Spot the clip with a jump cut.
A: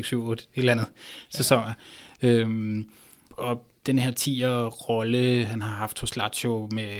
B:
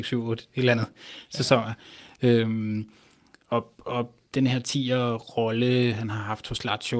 A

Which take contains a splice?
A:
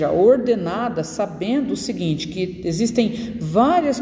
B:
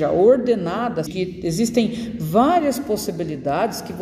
B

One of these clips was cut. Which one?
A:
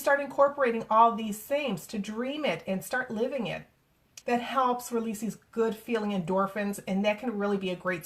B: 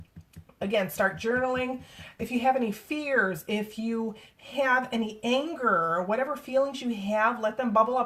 A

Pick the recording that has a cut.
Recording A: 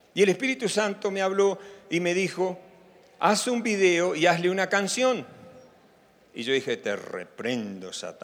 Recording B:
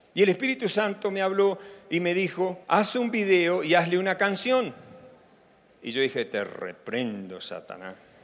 B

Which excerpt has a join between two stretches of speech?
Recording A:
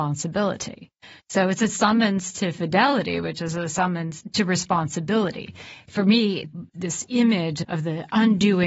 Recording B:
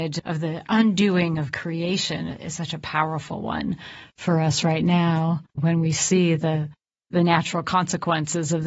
B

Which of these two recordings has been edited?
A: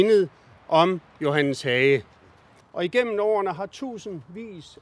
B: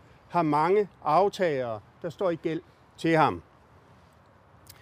A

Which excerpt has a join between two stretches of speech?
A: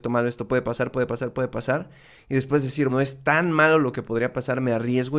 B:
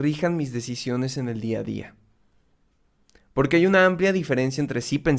A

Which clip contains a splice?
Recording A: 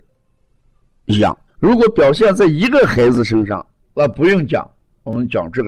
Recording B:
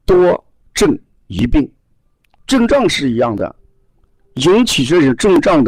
A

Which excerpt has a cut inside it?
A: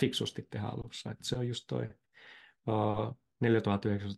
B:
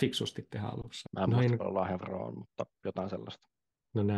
B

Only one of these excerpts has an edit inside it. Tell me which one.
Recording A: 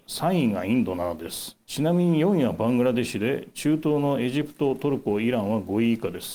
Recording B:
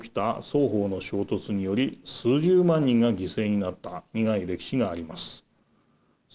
A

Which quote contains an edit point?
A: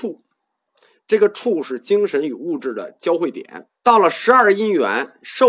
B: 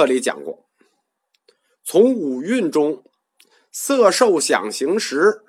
A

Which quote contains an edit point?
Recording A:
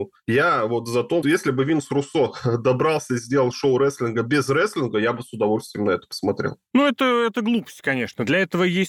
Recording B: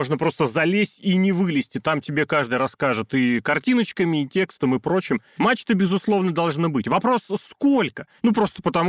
A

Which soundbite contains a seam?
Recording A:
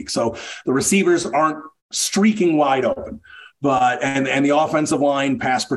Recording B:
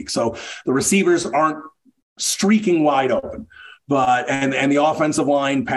A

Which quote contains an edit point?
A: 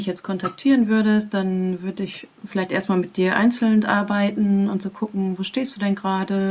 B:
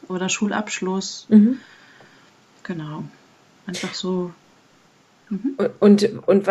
A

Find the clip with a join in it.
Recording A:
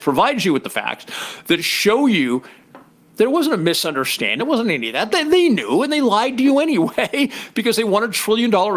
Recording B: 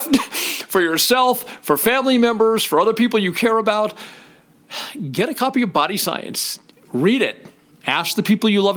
A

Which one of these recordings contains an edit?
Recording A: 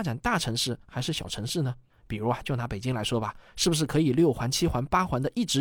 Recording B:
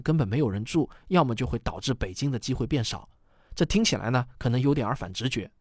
A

